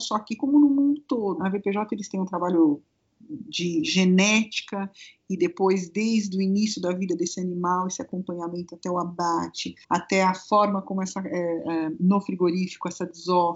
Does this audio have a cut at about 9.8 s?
yes; 2 cuts; at 1.4 s, 9.8 s

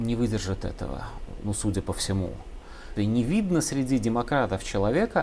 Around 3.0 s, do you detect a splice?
yes; 1 cut; at 3.0 s

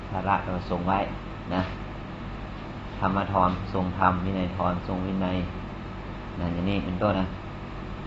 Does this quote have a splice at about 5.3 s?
no; 1 cut; at 7.1 s

